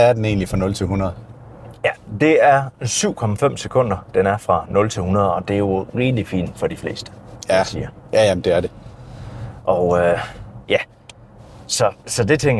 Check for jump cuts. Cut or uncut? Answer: uncut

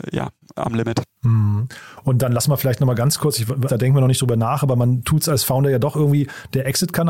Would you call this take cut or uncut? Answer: cut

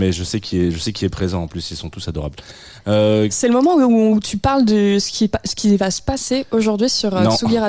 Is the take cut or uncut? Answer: uncut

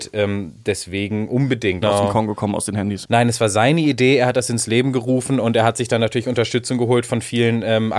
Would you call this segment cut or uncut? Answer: cut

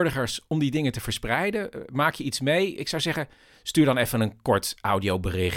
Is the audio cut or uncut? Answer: uncut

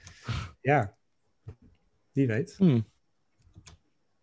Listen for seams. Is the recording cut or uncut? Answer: uncut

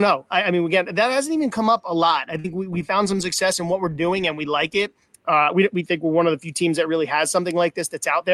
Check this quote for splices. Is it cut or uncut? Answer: uncut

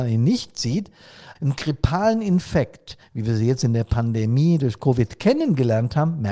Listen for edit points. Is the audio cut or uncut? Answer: cut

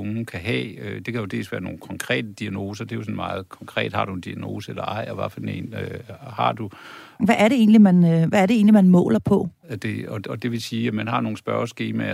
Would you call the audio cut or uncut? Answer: cut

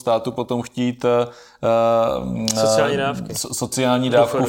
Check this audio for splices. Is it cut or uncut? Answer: uncut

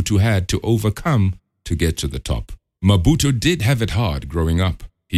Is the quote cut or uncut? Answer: cut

